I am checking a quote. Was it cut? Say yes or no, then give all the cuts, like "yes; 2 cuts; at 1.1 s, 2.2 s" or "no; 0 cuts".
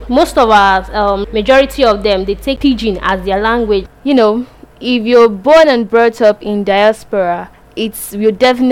yes; 2 cuts; at 1.2 s, 3.9 s